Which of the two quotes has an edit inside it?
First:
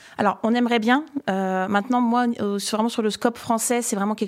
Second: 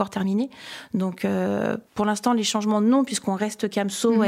second; 1 cut; at 1.9 s

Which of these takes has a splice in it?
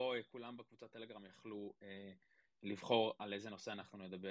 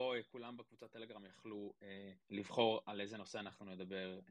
second; 1 cut; at 2.2 s

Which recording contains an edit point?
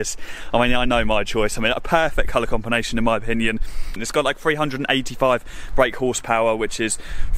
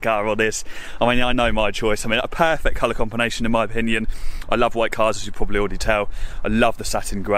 first; 1 cut; at 4.0 s

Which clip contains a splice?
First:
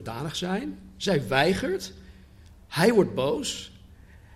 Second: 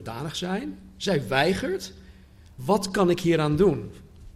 second; 1 cut; at 2.6 s

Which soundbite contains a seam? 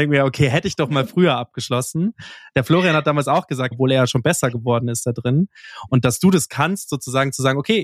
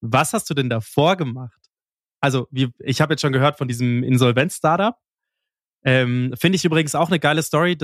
first; 1 cut; at 3.7 s

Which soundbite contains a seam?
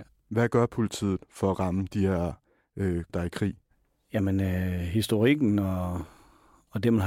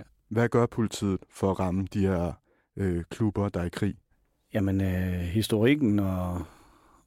first; 1 cut; at 3.1 s

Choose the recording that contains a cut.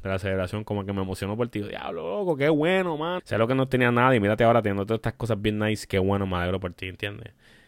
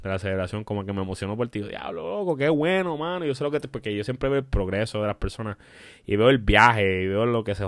first; 1 cut; at 3.2 s

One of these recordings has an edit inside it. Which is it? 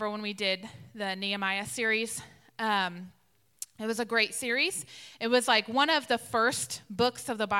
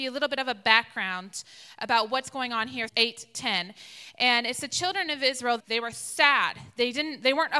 second; 2 cuts; at 2.9 s, 5.6 s

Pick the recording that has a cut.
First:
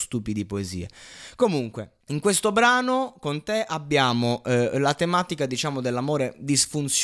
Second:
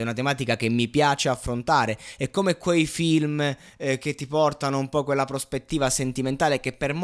first; 1 cut; at 2.0 s

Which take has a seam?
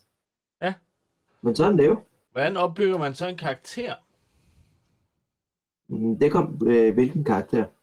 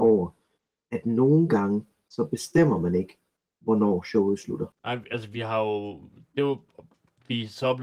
first; 2 cuts; at 1.3 s, 6.6 s

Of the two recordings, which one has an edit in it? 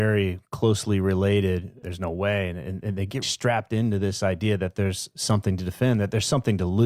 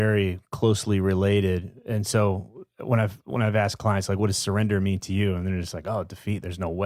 first; 2 cuts; at 1.8 s, 3.2 s

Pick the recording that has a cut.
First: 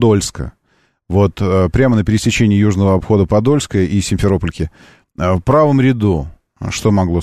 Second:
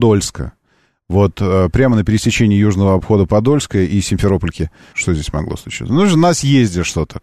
second; 1 cut; at 4.9 s

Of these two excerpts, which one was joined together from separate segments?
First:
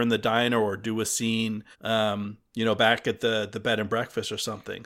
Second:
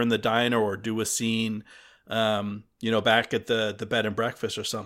first; 1 cut; at 1.7 s

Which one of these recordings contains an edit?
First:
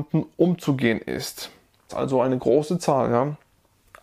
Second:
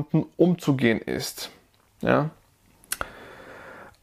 first; 1 cut; at 1.9 s

